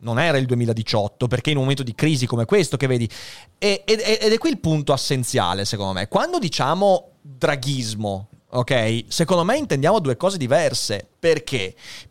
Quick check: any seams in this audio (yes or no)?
no